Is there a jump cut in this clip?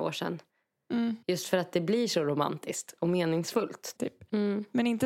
yes; 1 cut; at 4.0 s

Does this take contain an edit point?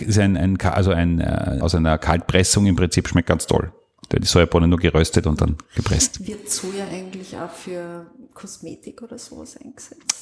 yes; 1 cut; at 1.6 s

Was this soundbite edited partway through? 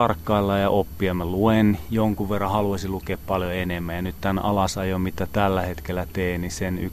no; 0 cuts

